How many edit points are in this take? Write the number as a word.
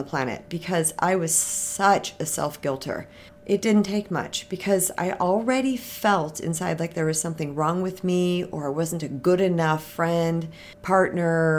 one